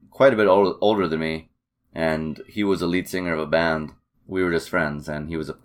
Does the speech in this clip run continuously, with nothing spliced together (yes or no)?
no